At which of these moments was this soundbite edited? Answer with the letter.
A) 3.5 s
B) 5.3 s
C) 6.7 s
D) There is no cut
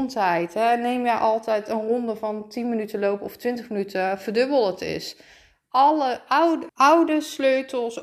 C